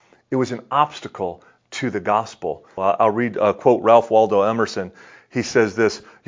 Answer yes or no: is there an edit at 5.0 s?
no